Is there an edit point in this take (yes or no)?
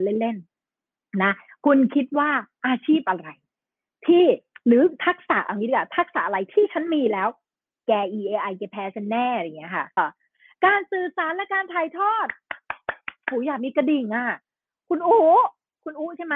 yes